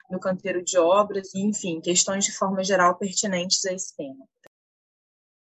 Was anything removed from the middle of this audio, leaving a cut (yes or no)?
yes